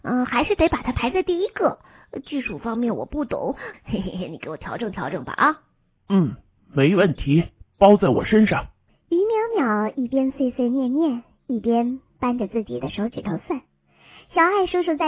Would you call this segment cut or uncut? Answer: cut